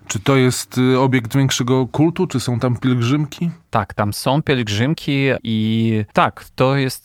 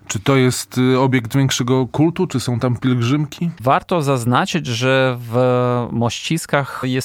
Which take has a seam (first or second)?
second